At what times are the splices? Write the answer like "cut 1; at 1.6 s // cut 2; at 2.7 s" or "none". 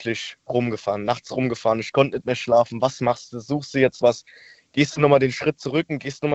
none